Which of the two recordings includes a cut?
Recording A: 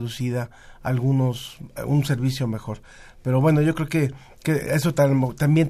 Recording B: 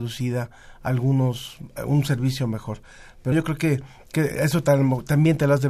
B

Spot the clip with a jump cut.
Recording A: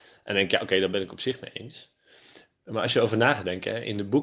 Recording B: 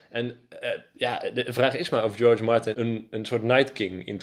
B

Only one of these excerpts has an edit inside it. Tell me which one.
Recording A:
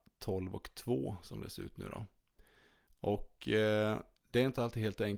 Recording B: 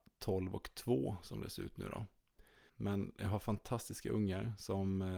B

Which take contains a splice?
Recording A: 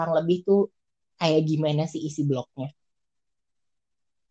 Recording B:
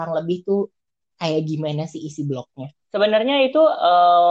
B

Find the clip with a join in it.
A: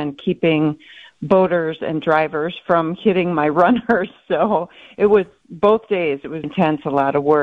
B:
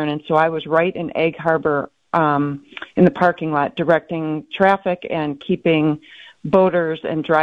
A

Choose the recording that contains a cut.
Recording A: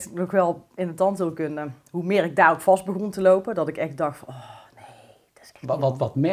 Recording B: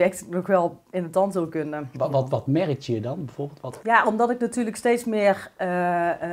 B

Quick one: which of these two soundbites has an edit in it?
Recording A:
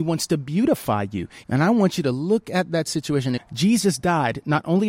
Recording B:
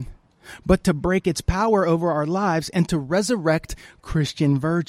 A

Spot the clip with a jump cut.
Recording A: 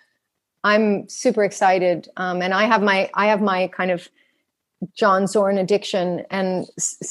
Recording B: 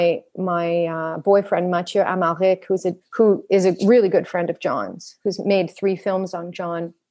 B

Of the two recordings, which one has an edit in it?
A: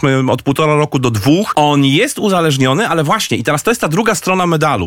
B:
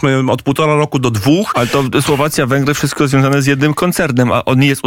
A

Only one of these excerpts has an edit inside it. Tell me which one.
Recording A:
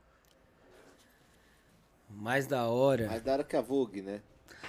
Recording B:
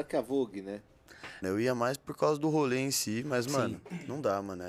B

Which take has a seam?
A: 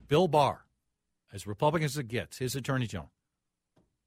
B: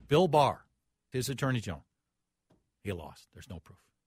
B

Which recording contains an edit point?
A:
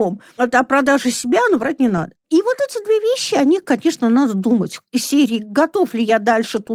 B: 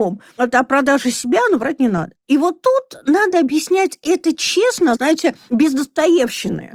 B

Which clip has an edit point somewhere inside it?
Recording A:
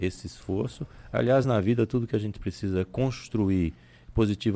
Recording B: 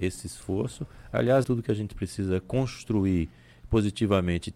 B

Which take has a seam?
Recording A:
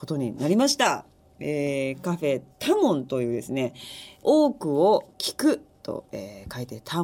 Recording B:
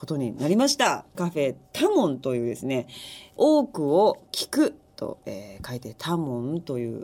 B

